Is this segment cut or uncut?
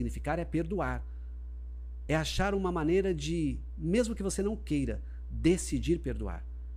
uncut